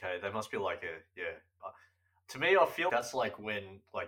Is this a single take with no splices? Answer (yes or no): no